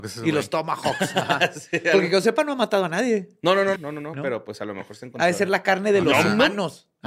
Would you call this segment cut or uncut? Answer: cut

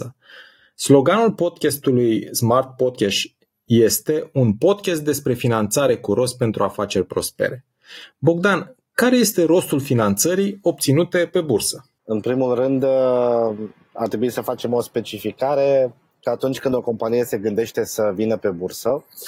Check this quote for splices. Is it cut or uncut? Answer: uncut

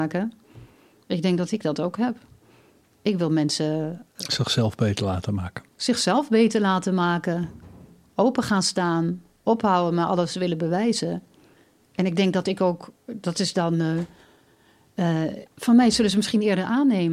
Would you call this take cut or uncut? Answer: cut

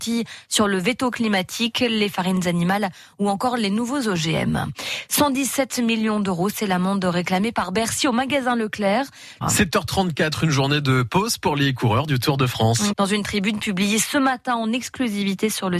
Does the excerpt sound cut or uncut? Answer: cut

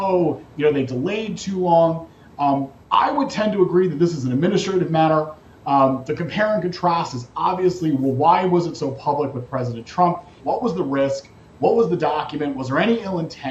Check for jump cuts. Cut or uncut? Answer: cut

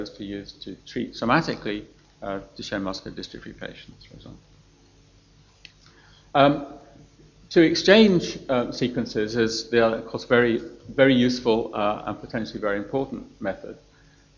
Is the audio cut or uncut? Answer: uncut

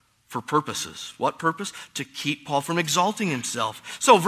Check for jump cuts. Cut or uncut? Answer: uncut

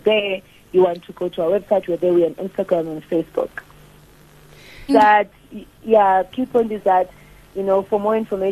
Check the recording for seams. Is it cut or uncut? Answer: cut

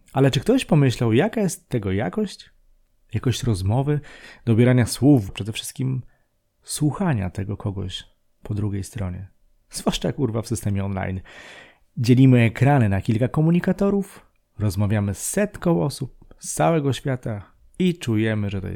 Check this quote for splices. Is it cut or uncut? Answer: cut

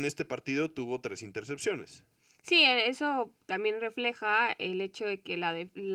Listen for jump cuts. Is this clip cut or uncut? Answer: uncut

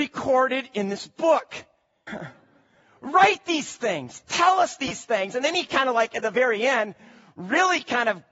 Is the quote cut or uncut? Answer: cut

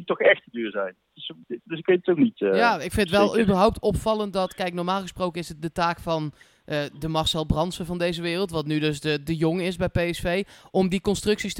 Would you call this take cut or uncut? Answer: uncut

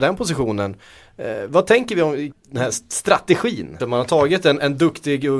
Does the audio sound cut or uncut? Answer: cut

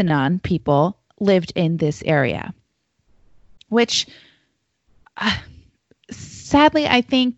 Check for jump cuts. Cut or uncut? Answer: uncut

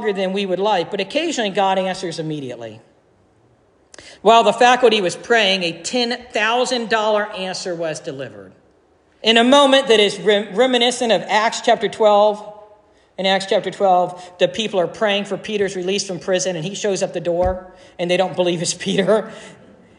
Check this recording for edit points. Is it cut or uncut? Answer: cut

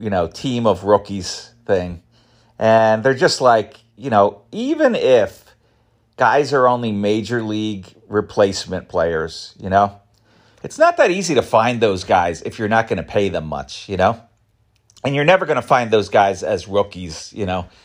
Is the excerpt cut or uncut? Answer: uncut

